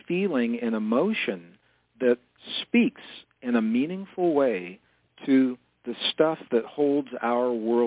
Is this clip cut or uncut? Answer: uncut